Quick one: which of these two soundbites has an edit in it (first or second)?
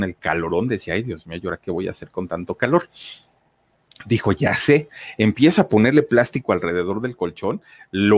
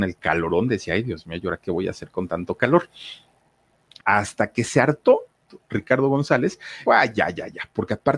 second